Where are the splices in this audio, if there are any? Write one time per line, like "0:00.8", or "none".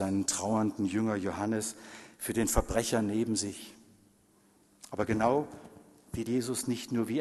none

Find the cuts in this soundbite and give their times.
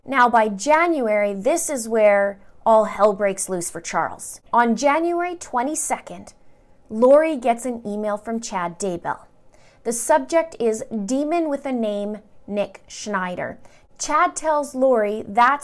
none

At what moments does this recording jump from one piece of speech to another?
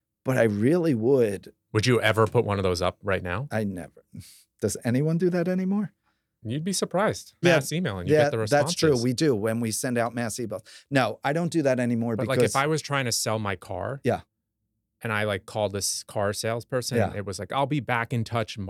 0:07.4

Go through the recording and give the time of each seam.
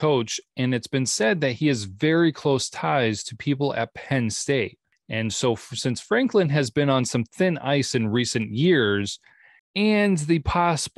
none

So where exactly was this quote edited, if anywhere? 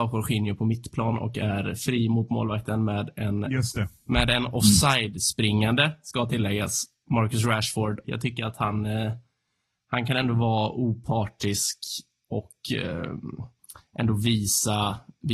0:08.0

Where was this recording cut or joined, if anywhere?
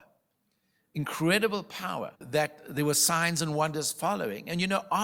0:02.1

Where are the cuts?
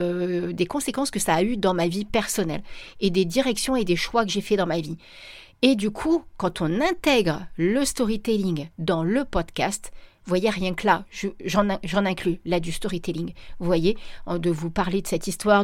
none

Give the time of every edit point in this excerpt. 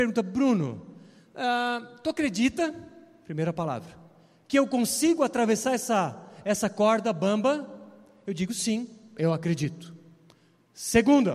none

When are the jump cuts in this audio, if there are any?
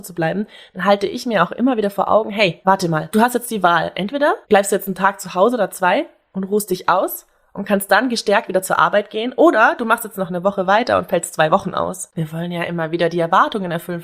0:12.1

